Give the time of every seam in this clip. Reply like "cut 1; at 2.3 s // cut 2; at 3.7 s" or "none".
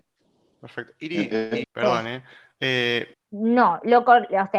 cut 1; at 1.6 s // cut 2; at 3.1 s